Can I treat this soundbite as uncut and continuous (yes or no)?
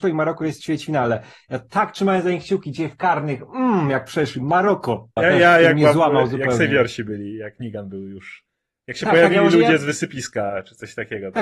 no